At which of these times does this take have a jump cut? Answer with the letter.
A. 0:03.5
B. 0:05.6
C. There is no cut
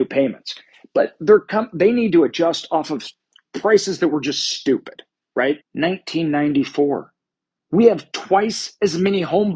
B